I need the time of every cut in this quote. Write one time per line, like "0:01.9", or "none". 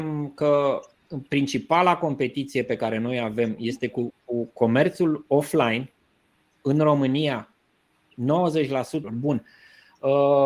0:09.0

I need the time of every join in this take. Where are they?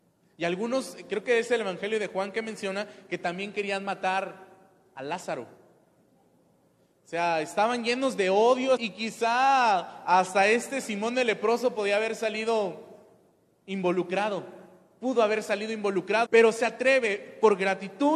0:08.8
0:16.3

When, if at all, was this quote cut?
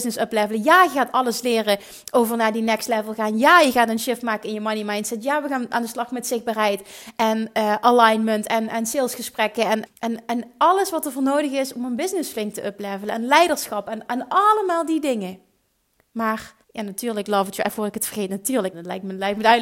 0:09.9
0:16.6
0:18.7

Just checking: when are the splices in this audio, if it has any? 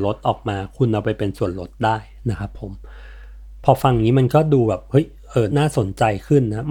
0:05.5

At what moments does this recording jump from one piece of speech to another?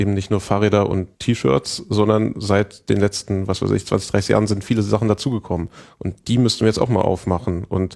0:01.1

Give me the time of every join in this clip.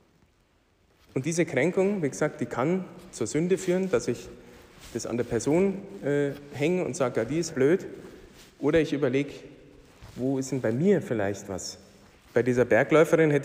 0:07.5
0:12.2

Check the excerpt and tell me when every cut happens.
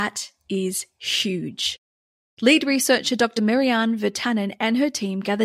none

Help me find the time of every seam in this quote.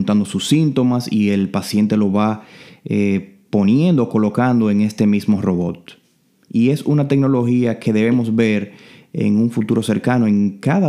none

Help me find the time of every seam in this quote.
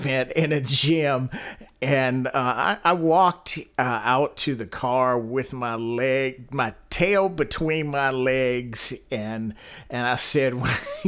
none

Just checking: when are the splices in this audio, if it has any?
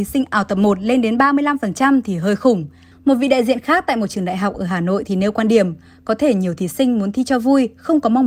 0:02.9

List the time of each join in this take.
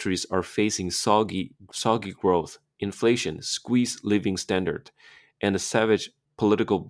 none

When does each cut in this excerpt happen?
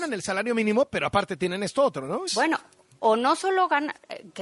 0:02.3

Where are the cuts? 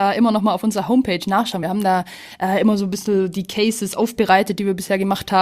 none

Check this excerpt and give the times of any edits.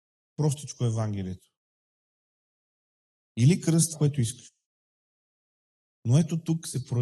0:03.9

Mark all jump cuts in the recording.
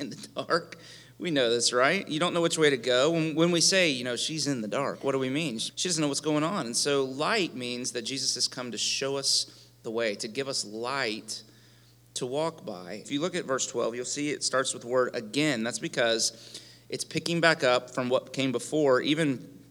0:05.7
0:13.0

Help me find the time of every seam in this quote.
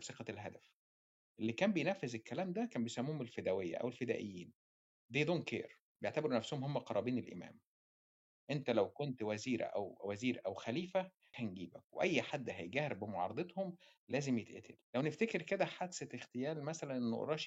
0:11.3
0:14.8

